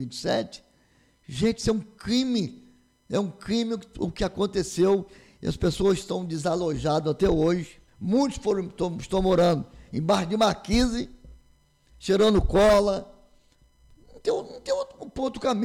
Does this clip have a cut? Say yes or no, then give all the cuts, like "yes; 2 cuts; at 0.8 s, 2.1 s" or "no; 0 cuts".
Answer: yes; 1 cut; at 7.9 s